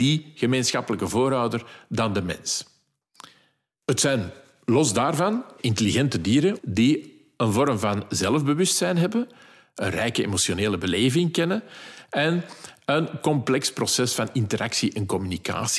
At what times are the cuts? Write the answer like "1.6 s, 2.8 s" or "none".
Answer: 6.6 s